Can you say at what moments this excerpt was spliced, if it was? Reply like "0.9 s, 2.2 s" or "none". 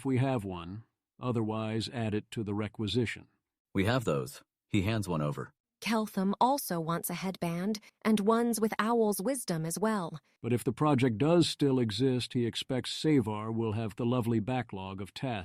7.9 s, 10.4 s, 14.0 s